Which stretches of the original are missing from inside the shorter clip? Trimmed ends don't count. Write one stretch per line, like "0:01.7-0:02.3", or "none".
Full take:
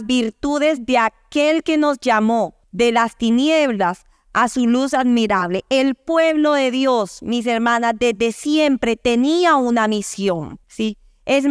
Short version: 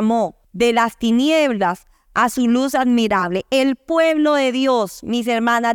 none